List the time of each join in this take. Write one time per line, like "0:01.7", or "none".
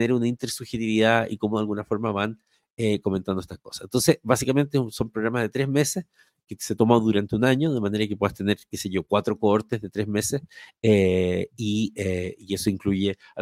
none